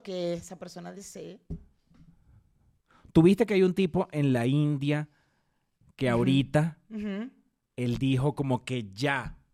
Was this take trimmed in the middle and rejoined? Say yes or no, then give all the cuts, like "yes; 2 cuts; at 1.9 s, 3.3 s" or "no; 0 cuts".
no; 0 cuts